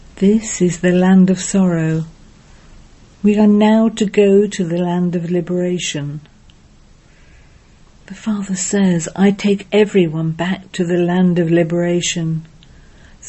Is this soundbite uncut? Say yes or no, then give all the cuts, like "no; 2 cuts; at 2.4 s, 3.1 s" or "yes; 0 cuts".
yes; 0 cuts